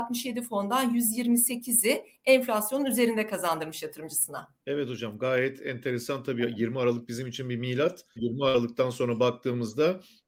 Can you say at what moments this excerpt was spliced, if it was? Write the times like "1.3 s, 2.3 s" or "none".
4.6 s, 8.2 s